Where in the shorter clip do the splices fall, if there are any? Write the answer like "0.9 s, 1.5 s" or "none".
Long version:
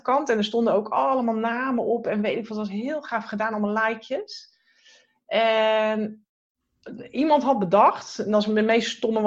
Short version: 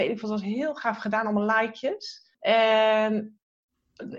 2.3 s